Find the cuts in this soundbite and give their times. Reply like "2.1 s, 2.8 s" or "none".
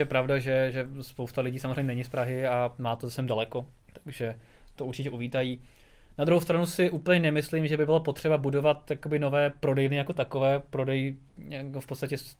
none